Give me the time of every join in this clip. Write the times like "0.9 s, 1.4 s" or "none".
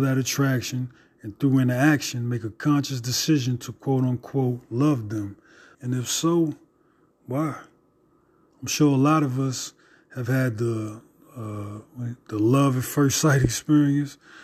5.7 s